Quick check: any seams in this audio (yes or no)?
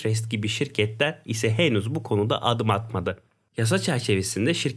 yes